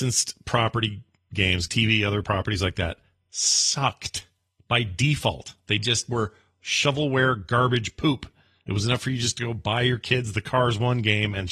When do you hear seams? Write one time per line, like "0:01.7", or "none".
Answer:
0:01.7